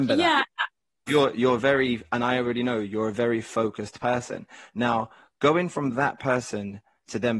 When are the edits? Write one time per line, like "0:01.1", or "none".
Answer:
0:01.1